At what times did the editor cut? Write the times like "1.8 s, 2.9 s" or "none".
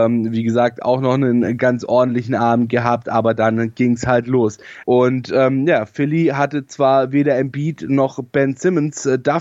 4.8 s